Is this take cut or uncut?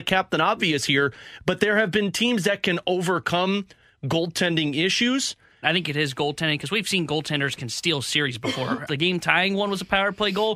cut